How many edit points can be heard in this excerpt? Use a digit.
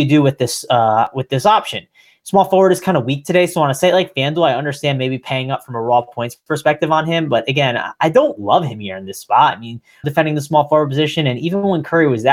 1